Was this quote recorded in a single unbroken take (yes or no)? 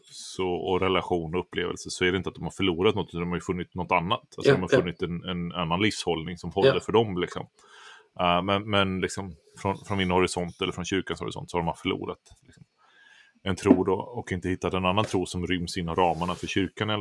yes